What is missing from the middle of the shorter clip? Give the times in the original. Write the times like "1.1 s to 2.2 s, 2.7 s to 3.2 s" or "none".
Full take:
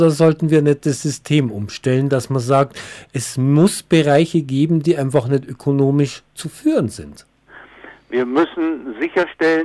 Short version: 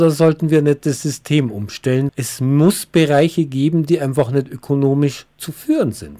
2.1 s to 3.1 s